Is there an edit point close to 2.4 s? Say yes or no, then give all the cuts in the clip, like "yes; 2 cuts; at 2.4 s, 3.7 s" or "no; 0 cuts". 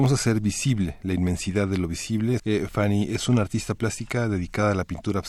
yes; 1 cut; at 2.4 s